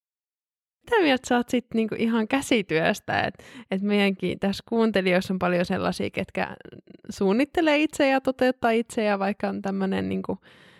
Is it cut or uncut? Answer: uncut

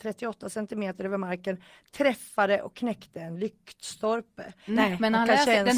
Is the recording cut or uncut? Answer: cut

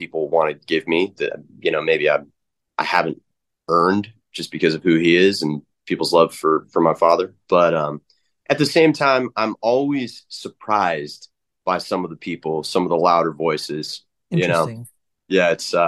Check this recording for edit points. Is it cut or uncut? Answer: uncut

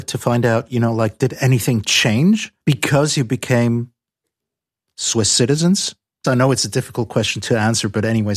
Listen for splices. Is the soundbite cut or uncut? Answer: cut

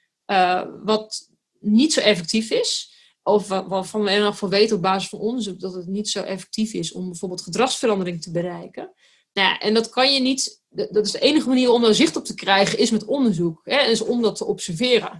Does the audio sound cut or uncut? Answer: uncut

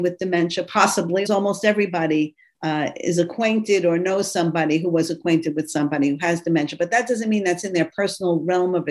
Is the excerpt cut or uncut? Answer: cut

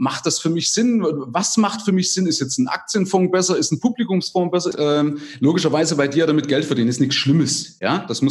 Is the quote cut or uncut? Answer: cut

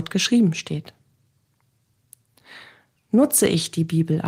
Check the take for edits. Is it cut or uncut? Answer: uncut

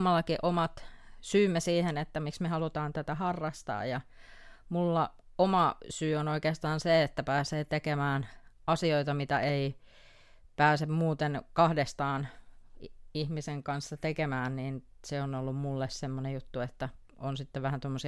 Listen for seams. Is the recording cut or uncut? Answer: uncut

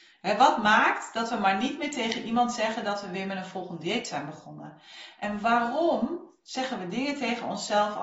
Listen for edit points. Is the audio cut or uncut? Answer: uncut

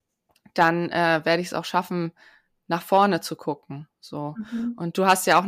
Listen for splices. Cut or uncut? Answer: uncut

